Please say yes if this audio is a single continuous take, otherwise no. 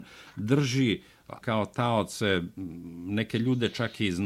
no